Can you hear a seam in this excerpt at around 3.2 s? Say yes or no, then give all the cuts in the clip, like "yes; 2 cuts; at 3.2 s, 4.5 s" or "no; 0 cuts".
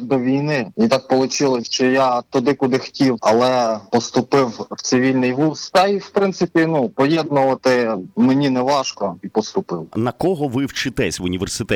yes; 1 cut; at 3.2 s